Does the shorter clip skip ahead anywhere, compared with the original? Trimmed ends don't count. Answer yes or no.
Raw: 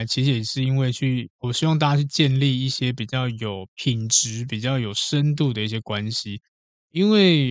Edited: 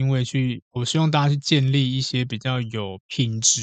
no